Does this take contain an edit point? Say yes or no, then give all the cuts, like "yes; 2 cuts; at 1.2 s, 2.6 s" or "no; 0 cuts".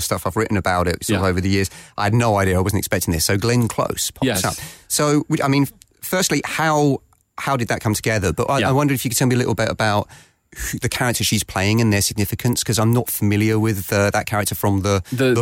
no; 0 cuts